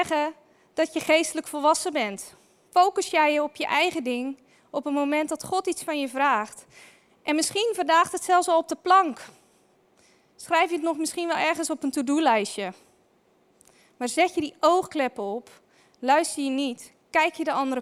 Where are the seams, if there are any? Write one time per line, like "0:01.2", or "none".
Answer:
0:02.7